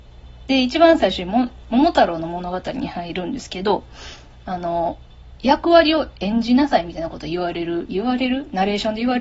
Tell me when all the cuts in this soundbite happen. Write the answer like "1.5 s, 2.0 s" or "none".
none